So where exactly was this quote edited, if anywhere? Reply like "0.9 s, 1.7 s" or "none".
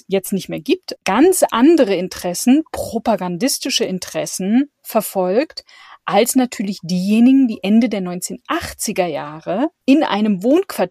1.0 s